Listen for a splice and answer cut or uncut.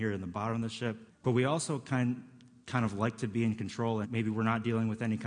cut